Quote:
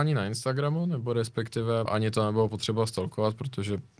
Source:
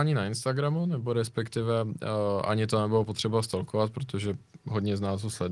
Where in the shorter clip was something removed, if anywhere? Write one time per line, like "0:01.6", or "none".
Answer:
0:01.9